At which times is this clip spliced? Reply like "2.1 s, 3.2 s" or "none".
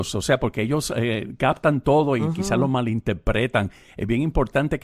none